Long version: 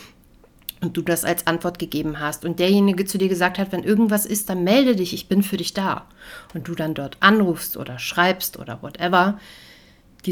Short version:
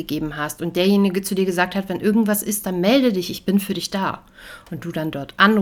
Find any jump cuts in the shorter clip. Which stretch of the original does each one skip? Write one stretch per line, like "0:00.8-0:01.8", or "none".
none